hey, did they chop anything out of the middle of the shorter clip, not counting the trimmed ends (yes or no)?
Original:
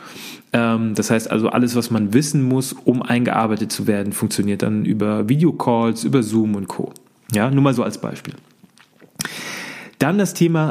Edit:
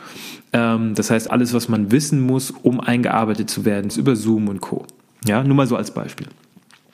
yes